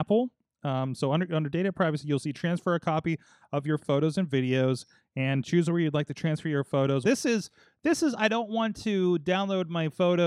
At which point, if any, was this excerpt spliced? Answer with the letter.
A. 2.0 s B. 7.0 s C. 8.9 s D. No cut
B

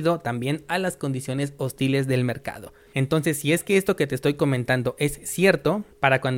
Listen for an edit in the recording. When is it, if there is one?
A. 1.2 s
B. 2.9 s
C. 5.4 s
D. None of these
B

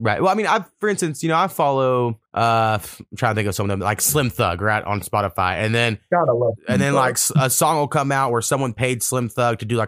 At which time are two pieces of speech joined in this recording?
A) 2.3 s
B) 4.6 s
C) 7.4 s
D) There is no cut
A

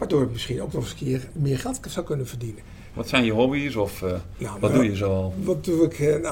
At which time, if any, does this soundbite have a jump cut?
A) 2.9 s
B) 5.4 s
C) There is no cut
A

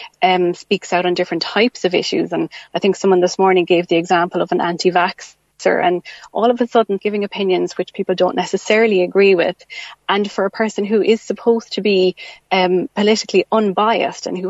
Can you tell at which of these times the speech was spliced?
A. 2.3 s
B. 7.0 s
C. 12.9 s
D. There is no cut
B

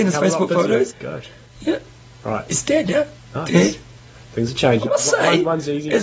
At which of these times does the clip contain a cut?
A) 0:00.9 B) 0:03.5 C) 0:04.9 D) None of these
A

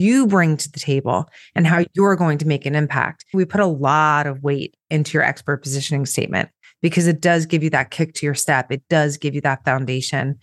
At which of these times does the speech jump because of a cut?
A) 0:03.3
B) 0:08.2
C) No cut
A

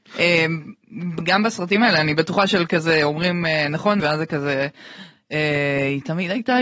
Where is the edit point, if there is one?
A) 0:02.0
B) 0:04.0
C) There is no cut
B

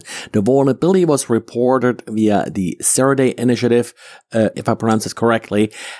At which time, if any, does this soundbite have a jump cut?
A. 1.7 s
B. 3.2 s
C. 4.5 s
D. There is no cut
C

